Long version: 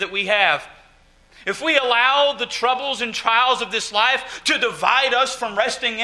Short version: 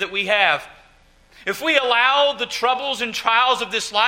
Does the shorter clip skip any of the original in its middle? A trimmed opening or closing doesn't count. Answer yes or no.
no